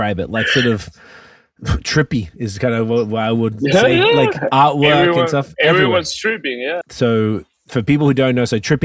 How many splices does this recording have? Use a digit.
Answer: 1